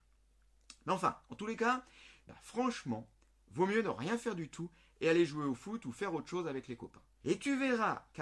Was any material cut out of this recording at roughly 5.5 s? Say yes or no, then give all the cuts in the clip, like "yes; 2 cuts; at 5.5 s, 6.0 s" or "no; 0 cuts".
no; 2 cuts; at 2.2 s, 7.2 s